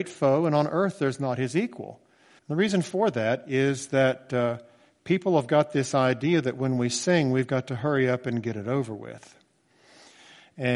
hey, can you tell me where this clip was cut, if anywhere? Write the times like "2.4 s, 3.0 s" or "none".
2.4 s